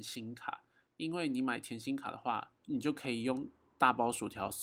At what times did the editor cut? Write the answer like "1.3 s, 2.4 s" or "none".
2.6 s